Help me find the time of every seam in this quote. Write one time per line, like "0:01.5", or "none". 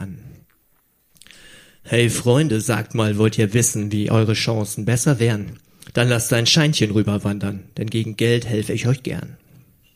none